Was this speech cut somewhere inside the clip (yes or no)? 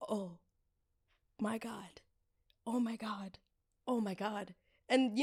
no